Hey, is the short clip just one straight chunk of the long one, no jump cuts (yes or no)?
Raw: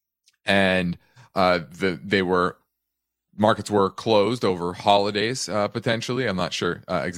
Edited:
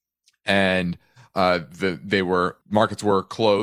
no